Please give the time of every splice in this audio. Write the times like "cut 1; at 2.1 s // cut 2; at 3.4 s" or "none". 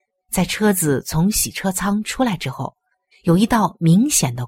cut 1; at 3.1 s